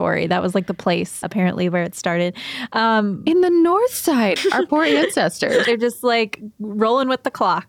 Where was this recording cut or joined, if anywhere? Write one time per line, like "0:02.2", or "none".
0:01.2
0:04.4
0:05.6